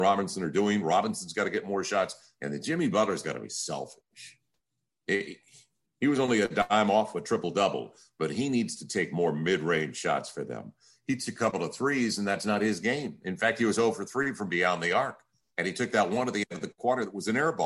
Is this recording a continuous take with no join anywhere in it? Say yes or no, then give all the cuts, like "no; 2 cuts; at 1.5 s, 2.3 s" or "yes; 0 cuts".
yes; 0 cuts